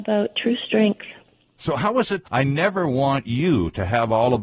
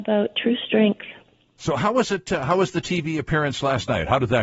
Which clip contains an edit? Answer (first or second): first